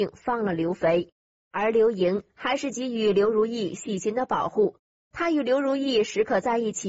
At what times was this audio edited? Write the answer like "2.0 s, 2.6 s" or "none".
1.3 s